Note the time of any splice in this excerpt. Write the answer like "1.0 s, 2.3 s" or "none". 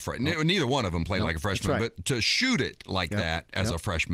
none